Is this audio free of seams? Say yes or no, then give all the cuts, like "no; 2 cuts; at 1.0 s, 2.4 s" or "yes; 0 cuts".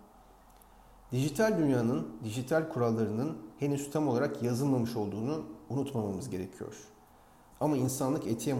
no; 1 cut; at 7.5 s